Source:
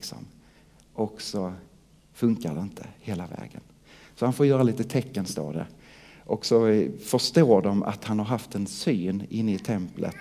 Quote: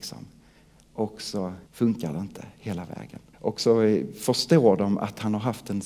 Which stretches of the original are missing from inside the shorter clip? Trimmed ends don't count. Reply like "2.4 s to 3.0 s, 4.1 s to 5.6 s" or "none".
1.7 s to 2.1 s, 3.7 s to 6.2 s